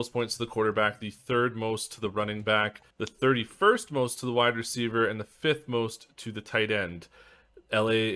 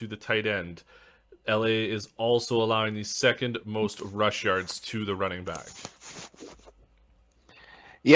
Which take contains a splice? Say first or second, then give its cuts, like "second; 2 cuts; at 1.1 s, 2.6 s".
first; 1 cut; at 2.9 s